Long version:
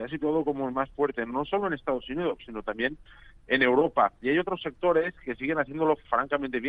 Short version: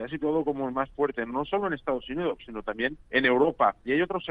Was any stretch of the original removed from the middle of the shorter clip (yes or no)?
yes